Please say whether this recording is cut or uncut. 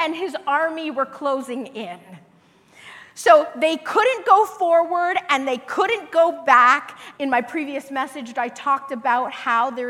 cut